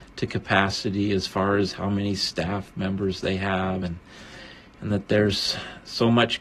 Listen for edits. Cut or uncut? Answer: uncut